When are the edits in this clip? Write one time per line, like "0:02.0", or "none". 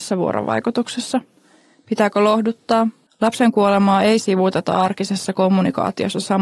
0:03.1